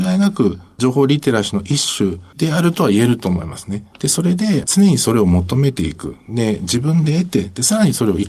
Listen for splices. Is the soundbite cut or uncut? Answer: cut